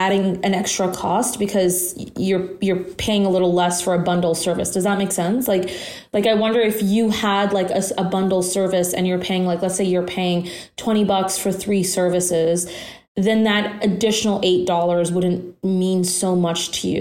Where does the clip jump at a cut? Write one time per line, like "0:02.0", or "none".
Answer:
0:13.0